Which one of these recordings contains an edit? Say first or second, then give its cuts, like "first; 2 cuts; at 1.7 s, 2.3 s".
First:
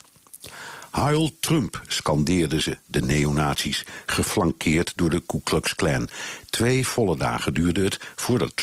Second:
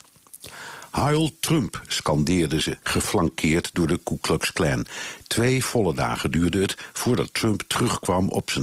second; 1 cut; at 2.8 s